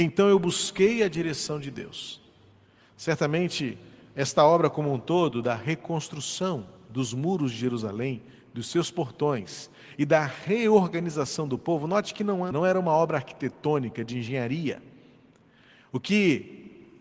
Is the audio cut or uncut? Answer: cut